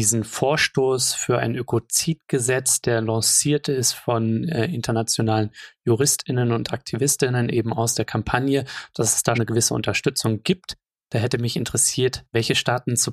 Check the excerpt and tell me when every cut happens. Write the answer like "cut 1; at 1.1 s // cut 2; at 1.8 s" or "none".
cut 1; at 9.3 s